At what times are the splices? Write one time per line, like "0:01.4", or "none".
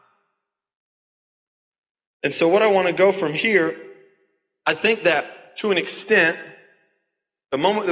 none